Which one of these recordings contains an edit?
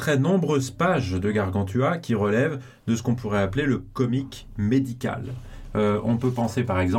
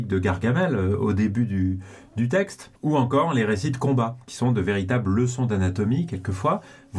second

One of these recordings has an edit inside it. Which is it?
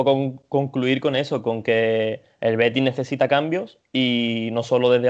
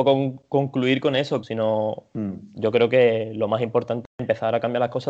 second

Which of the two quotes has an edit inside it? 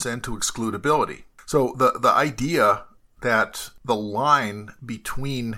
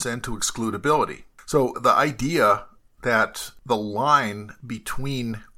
second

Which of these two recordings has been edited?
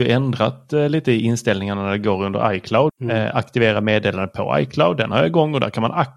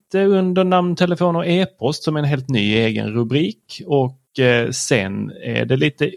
first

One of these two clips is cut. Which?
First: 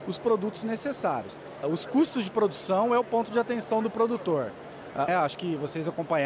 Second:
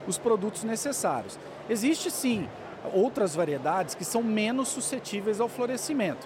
first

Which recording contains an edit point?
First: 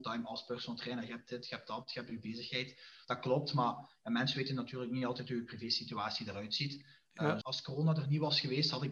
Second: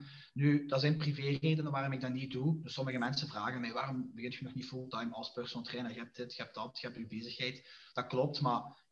first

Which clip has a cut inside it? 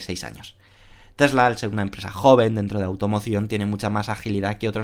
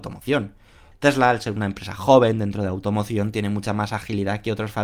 second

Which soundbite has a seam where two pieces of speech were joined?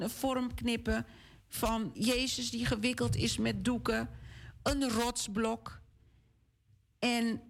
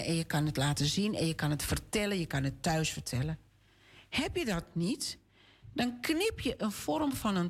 first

